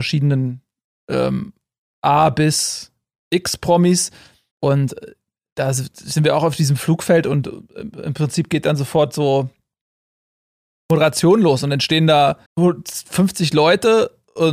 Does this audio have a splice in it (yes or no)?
yes